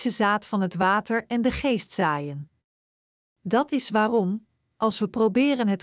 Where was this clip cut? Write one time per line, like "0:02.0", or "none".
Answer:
0:03.2